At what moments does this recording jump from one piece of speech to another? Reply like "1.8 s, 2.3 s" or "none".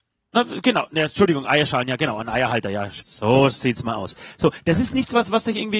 3.0 s